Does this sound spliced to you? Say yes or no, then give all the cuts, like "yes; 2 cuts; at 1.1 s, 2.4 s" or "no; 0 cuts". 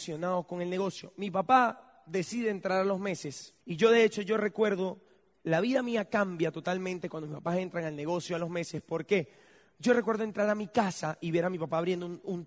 yes; 1 cut; at 3.6 s